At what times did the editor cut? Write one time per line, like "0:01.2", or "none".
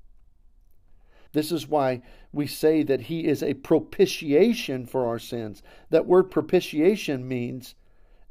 0:01.3